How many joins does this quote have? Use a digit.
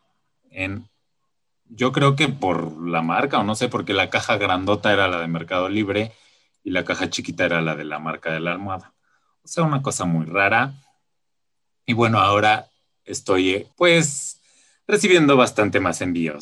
1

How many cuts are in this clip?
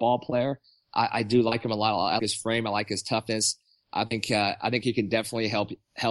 1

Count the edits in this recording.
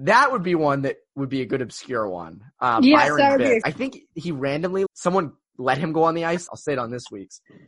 3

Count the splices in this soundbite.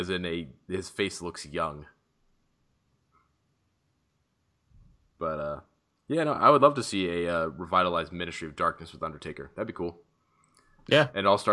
0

